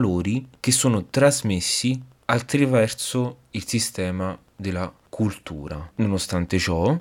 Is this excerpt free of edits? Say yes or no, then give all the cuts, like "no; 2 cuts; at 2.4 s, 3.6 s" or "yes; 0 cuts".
no; 1 cut; at 5.9 s